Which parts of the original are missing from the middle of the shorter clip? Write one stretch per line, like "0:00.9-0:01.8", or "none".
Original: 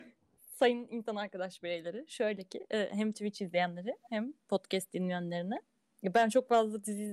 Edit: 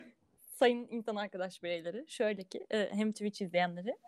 none